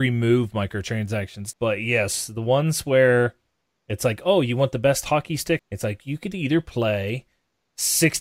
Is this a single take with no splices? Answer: no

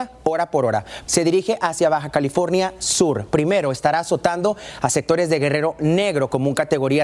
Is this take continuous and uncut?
no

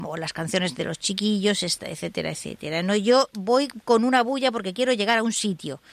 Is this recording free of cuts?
yes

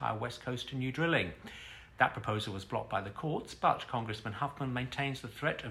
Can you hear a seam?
no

